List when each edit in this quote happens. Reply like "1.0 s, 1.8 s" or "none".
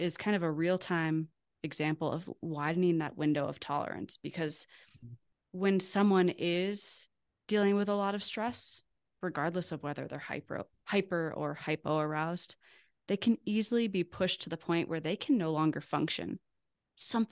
none